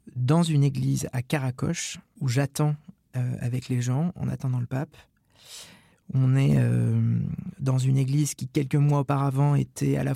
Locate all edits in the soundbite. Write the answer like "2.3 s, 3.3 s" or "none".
5.9 s